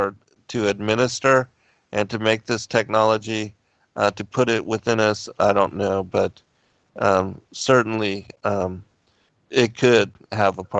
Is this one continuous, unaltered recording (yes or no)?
yes